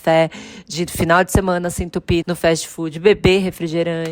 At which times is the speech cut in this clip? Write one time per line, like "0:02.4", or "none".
0:02.2